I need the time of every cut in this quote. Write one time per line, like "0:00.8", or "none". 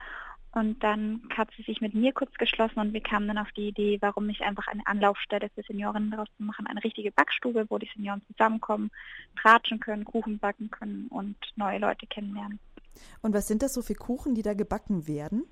none